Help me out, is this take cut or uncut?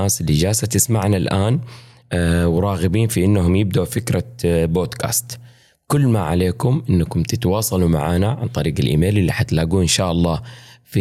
uncut